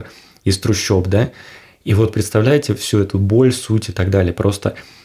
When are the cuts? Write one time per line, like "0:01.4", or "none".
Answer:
none